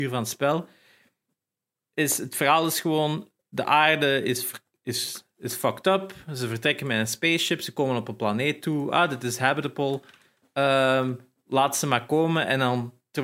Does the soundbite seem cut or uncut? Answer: uncut